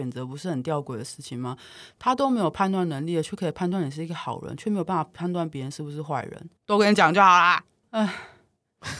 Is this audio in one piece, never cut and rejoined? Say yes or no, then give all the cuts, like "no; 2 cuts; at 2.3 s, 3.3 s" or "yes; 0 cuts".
no; 2 cuts; at 6.6 s, 7.8 s